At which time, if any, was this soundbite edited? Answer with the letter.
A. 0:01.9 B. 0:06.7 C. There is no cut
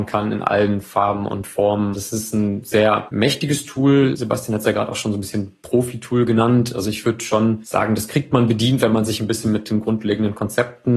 A